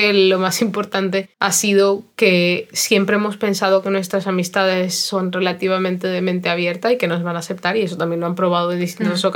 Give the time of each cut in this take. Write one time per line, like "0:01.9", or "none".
0:01.3